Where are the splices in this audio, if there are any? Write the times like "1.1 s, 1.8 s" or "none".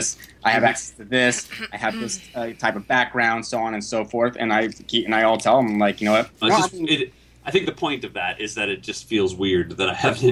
6.4 s